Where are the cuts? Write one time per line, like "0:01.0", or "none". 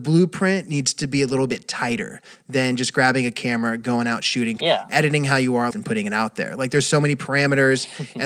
0:04.6
0:05.7